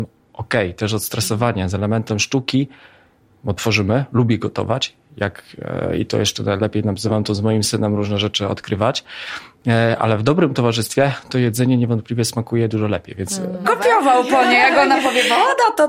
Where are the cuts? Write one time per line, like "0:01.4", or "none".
0:13.6